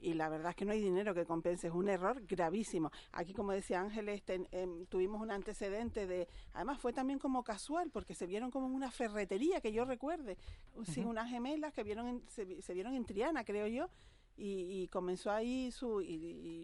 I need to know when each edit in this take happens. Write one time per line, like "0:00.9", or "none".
0:10.7

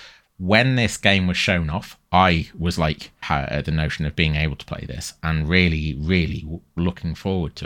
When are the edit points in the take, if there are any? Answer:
0:03.2

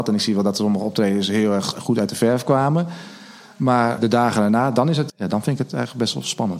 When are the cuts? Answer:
0:04.0
0:05.1

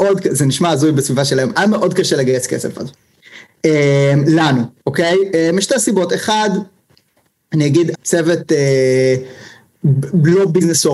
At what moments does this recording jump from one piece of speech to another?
0:07.9

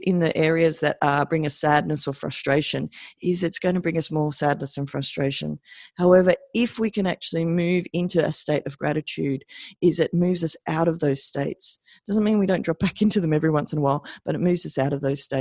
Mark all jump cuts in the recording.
none

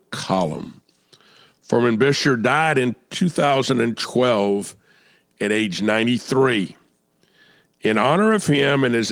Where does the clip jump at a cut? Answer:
none

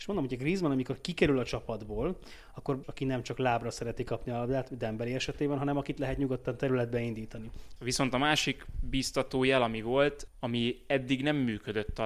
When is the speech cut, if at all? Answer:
0:02.8
0:07.8
0:10.3

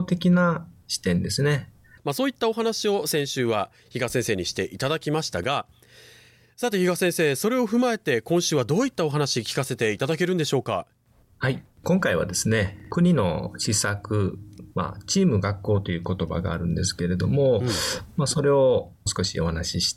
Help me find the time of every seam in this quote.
0:02.0

